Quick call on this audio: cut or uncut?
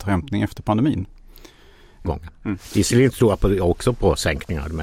cut